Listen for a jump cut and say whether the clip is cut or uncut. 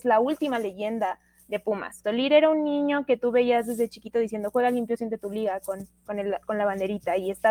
cut